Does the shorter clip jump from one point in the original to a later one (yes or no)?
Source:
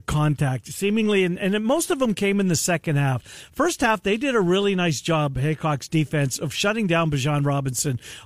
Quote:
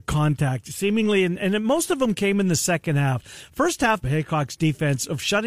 yes